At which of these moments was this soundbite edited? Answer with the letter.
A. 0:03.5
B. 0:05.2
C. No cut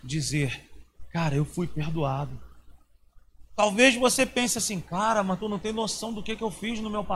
A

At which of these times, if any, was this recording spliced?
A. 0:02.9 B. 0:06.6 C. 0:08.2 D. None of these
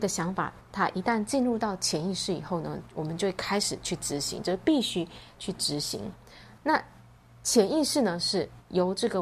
B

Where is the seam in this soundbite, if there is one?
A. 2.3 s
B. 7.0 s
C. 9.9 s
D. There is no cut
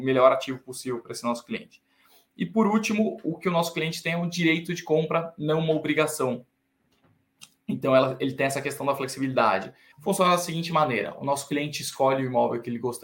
C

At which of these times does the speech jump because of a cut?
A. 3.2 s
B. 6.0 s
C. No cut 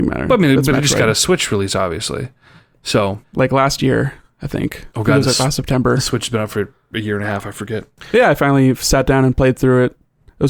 A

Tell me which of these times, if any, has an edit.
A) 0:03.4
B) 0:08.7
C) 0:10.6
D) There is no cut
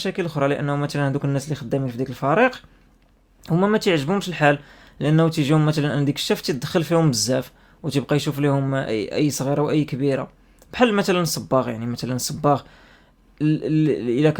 D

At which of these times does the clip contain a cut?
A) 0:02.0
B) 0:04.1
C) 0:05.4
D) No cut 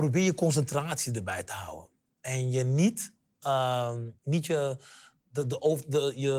D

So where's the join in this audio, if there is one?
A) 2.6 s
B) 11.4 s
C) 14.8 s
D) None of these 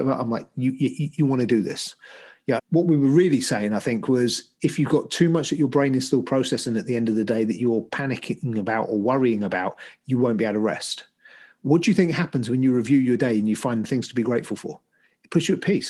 A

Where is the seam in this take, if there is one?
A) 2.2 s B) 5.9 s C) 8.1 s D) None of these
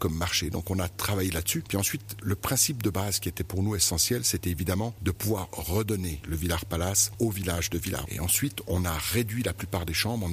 C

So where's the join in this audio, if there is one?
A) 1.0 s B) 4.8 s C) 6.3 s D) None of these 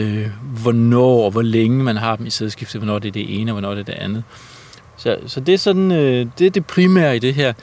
B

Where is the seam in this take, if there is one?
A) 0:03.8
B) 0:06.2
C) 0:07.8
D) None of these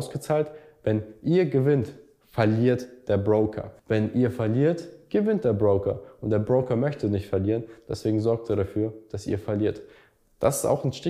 A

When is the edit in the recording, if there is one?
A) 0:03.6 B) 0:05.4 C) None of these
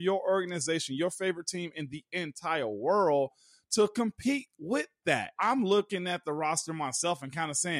B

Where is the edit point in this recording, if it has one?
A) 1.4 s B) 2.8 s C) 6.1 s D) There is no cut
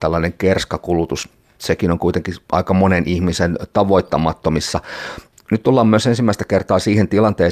D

